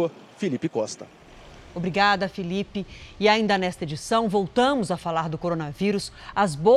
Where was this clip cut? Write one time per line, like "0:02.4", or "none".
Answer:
none